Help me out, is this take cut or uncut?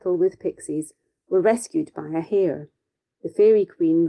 uncut